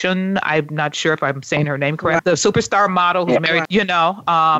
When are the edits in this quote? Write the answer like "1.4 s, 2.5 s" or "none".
2.2 s, 3.7 s